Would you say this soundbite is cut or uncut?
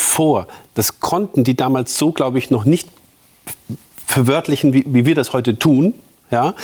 uncut